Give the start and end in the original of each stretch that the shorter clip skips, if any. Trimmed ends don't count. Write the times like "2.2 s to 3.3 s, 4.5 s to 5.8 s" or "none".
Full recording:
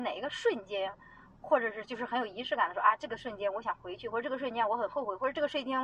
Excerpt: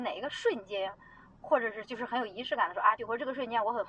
3.0 s to 4.0 s